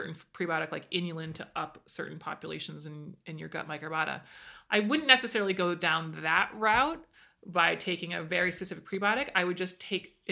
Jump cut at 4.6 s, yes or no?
no